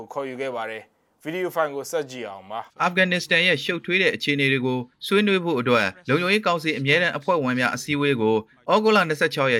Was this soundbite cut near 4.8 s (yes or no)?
no